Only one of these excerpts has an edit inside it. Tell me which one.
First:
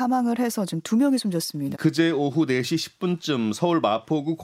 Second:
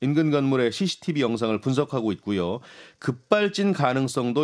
first; 1 cut; at 1.7 s

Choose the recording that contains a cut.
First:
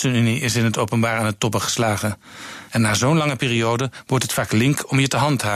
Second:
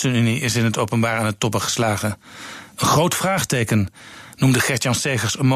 first; 1 cut; at 2.7 s

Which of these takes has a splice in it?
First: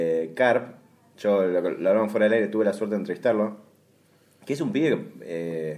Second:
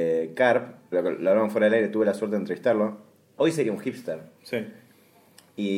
second; 2 cuts; at 0.9 s, 3.4 s

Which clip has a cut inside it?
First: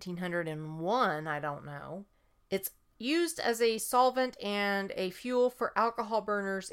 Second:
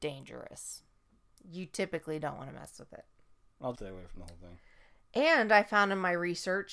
second; 1 cut; at 3.7 s

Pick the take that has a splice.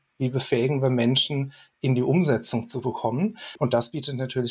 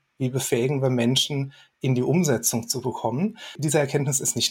first; 1 cut; at 3.6 s

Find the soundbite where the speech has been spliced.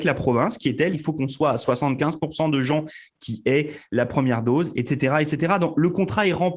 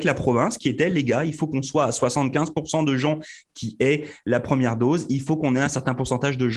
first; 2 cuts; at 0.9 s, 4.7 s

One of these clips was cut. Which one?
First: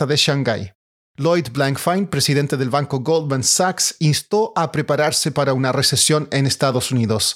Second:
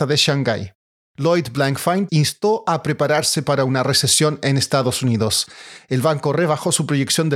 second; 1 cut; at 2.1 s

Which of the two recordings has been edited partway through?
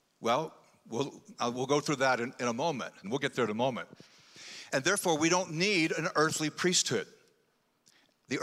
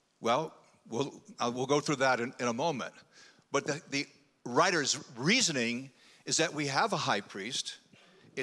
first; 2 cuts; at 3.0 s, 4.7 s

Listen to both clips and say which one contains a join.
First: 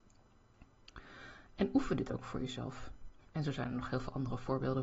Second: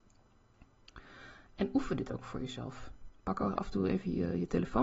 first; 1 cut; at 3.2 s

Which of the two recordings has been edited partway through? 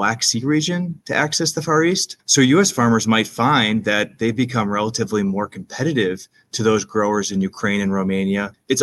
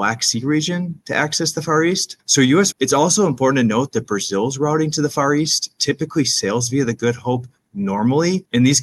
second; 1 cut; at 2.7 s

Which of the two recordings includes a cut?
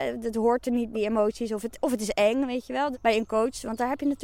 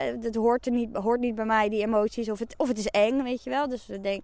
first; 2 cuts; at 0.9 s, 2.9 s

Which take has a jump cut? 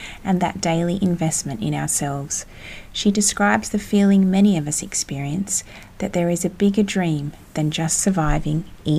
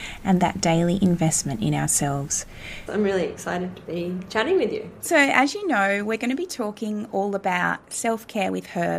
second; 2 cuts; at 2.9 s, 5.0 s

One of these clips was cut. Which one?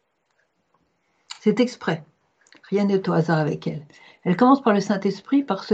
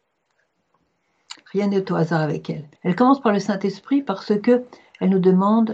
second; 2 cuts; at 1.3 s, 2.8 s

